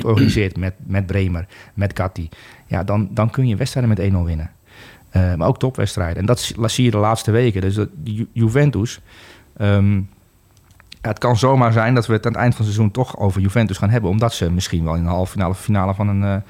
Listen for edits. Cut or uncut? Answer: uncut